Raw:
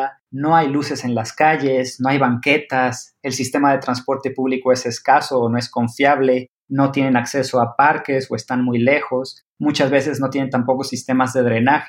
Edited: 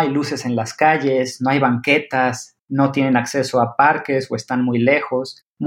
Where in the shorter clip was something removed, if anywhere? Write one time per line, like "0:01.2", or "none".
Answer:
0:02.6